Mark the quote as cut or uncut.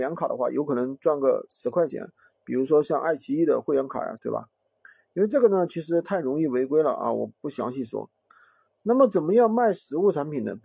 cut